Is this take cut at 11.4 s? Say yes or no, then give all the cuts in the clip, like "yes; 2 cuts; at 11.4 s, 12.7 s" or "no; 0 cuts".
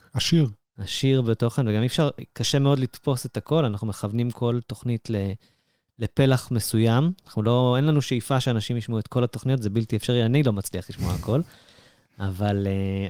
no; 0 cuts